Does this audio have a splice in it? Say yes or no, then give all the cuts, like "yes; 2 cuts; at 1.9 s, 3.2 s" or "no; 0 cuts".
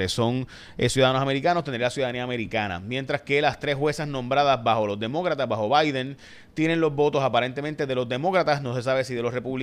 no; 0 cuts